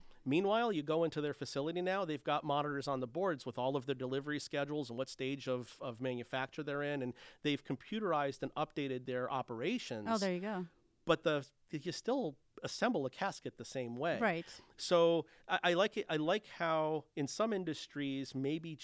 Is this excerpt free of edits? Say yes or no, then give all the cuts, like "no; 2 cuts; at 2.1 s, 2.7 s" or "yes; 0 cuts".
yes; 0 cuts